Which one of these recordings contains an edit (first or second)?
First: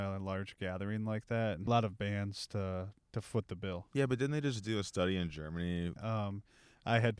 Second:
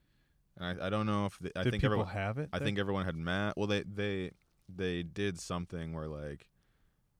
first